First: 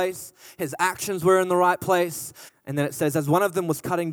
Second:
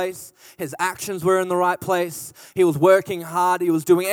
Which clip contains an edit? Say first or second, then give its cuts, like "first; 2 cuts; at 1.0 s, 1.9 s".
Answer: first; 1 cut; at 2.5 s